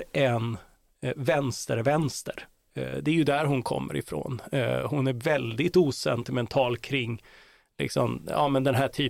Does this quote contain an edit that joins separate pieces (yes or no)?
no